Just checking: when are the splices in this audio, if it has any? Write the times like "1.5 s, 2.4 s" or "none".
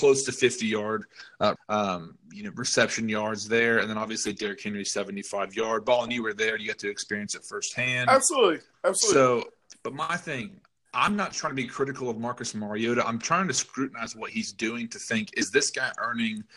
1.6 s